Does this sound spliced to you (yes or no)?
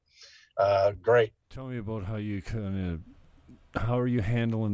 yes